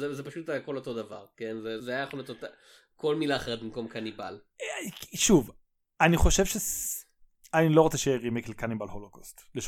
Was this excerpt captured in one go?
no; 1 cut; at 1.8 s

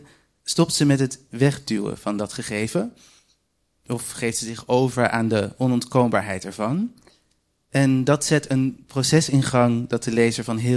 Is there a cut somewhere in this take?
no; 0 cuts

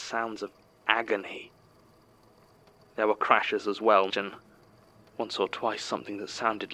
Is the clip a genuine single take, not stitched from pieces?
no; 1 cut; at 4.1 s

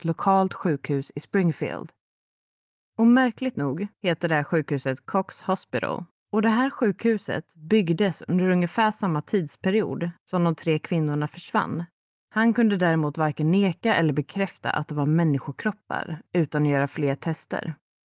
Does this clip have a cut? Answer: yes; 2 cuts; at 6.1 s, 12.2 s

